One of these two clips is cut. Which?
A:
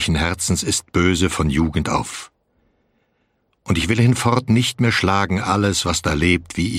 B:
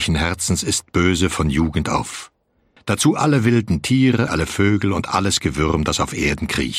B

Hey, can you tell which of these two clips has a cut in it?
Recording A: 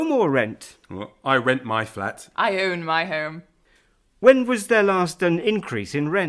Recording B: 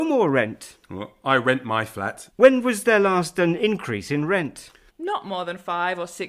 B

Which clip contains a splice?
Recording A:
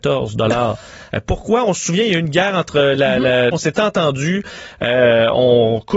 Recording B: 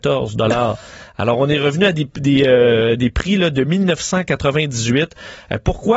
A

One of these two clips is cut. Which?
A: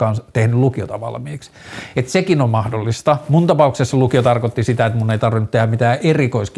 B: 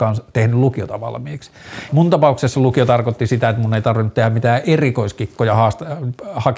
B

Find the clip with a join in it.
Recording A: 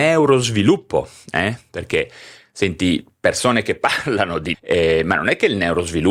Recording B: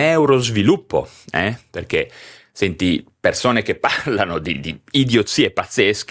A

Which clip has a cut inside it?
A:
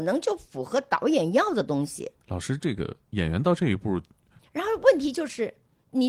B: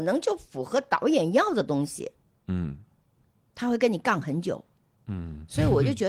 A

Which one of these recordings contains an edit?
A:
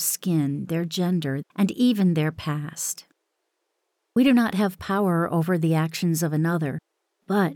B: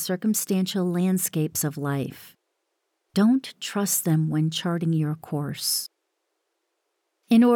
A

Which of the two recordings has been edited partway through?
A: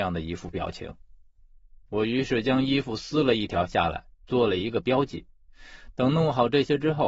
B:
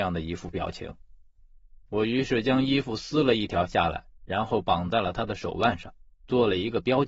A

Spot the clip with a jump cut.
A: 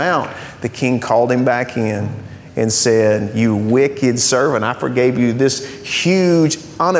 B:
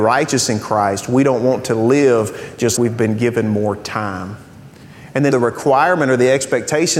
B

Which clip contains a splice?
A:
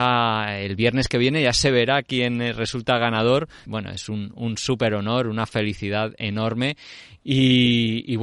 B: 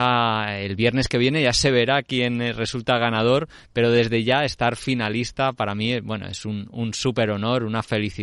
A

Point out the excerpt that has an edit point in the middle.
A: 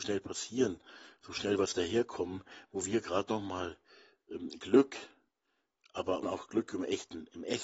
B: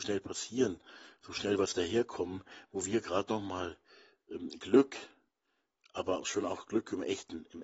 A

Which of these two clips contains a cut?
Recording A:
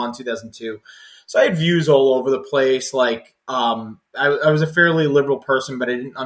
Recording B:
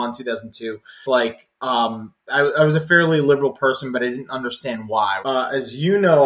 B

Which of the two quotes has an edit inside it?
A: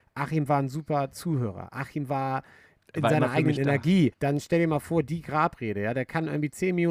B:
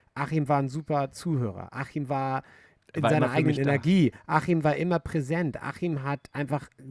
A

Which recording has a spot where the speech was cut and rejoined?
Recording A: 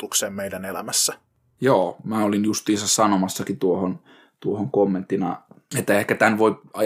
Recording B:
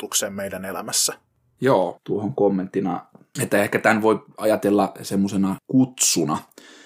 B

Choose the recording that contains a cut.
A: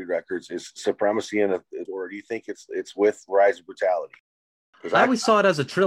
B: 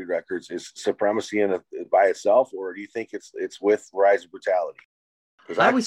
A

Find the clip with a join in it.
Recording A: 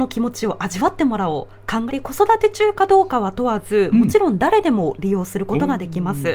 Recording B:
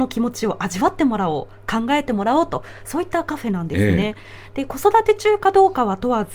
A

